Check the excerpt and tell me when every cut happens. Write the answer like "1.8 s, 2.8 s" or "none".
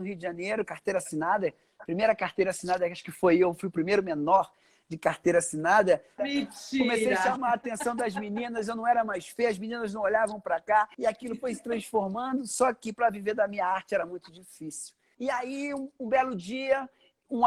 6.2 s, 10.9 s, 15.1 s